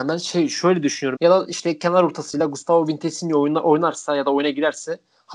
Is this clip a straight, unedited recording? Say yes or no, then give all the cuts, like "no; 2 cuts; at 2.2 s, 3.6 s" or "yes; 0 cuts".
no; 1 cut; at 1.2 s